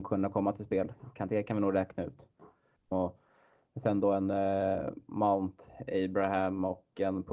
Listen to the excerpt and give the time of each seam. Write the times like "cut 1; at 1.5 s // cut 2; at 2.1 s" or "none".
cut 1; at 2.9 s